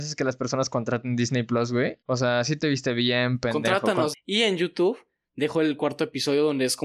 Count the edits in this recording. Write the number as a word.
two